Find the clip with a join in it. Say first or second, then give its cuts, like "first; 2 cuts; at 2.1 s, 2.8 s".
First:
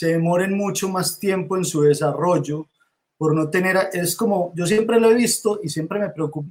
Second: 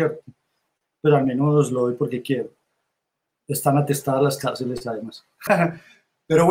second; 1 cut; at 5.5 s